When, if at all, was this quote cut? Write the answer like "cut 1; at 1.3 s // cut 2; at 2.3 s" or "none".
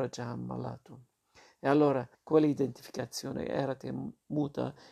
cut 1; at 2.1 s